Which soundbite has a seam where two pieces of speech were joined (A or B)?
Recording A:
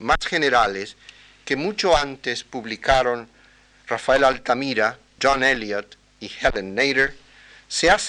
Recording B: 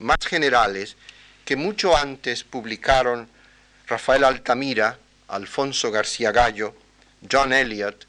A